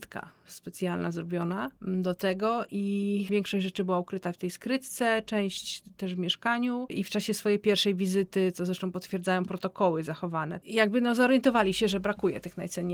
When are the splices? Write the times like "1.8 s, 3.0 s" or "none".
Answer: 6.9 s, 10.6 s